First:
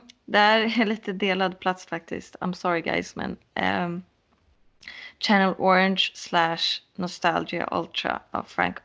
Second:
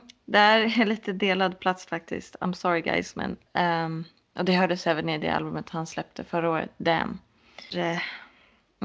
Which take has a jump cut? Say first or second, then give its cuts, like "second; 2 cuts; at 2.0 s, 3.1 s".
second; 2 cuts; at 3.5 s, 7.7 s